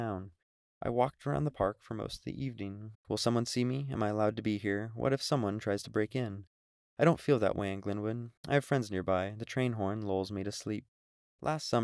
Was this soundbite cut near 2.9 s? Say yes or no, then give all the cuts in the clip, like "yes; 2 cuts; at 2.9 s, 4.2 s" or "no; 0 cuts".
yes; 1 cut; at 2.9 s